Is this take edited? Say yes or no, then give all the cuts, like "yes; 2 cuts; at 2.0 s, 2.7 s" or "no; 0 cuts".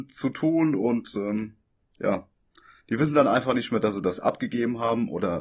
no; 0 cuts